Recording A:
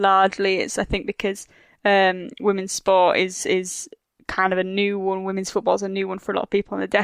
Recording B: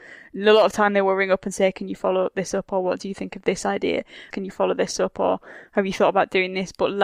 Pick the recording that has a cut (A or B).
B